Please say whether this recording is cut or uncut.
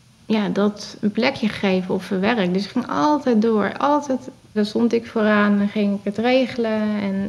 cut